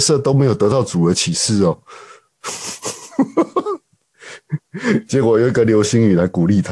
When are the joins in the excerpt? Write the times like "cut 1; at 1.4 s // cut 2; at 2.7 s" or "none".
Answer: none